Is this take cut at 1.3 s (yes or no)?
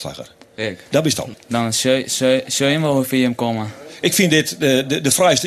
yes